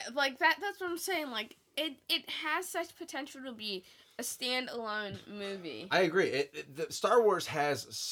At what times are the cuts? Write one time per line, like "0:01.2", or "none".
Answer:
none